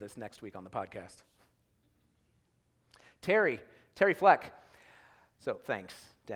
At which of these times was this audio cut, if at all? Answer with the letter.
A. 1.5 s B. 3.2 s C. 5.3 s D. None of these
C